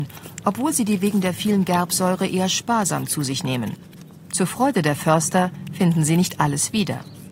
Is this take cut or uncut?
uncut